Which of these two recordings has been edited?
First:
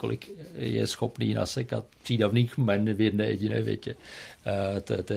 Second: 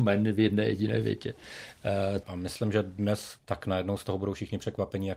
second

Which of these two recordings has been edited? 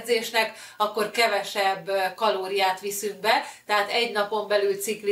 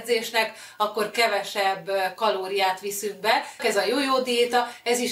second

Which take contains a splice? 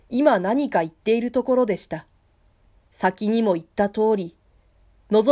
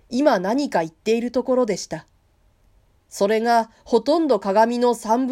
first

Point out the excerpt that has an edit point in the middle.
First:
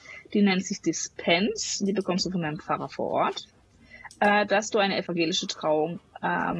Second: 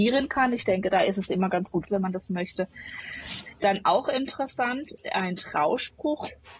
second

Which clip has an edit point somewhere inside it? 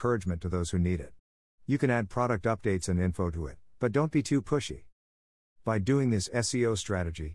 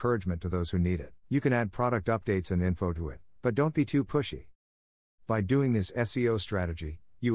second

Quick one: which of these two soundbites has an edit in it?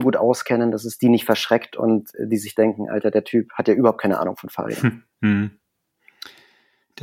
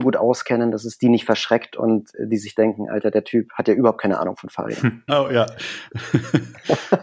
second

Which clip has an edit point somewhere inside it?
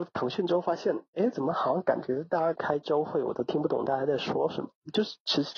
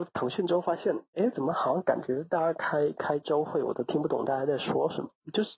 first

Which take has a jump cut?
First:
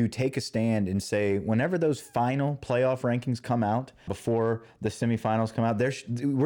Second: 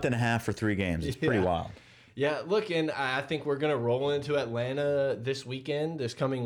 first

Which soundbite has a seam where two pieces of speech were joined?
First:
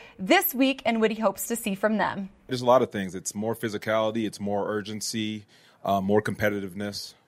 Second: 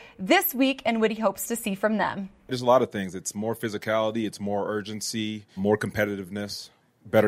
second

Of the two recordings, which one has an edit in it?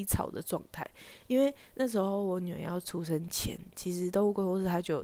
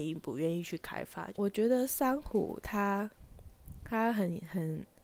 second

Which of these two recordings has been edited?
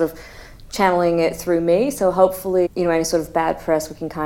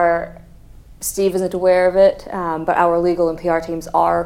first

